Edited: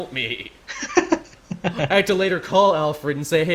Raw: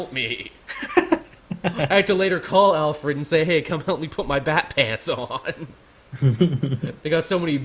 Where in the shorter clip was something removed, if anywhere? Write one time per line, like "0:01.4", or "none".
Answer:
none